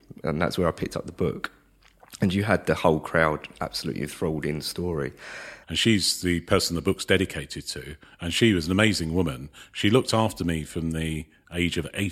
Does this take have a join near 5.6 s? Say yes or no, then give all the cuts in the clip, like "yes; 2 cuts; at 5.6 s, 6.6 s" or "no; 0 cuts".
yes; 1 cut; at 5.6 s